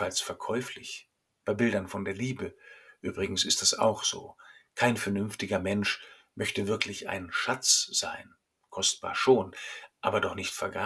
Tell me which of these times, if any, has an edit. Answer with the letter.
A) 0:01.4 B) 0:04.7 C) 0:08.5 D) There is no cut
A